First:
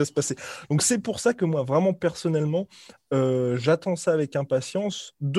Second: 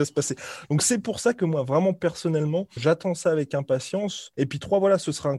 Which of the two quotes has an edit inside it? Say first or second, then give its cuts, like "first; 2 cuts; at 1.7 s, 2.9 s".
second; 2 cuts; at 2.8 s, 4.3 s